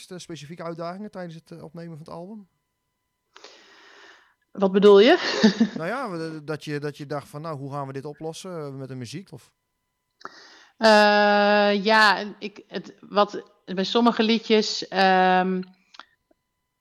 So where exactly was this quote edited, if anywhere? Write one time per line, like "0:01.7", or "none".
0:09.3